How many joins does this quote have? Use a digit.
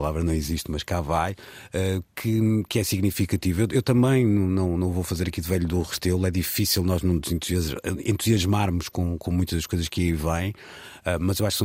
0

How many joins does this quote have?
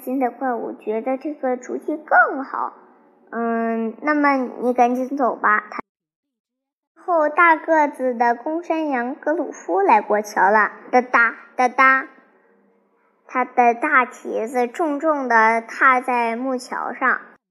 0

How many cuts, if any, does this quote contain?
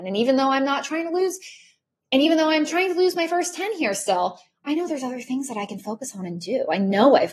0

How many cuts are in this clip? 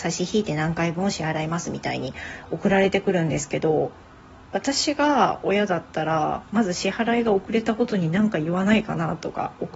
0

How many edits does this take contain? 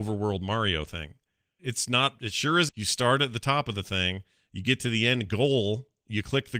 2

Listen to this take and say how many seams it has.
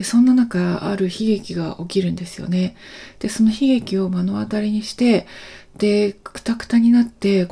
0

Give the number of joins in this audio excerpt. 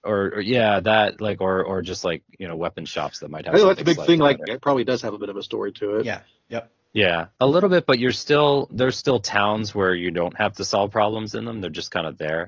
1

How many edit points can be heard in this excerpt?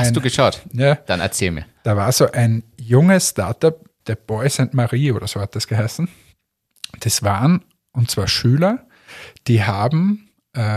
1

